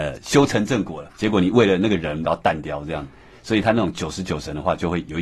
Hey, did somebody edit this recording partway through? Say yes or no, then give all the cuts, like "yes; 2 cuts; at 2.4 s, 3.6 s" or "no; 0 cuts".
yes; 2 cuts; at 1.1 s, 2.2 s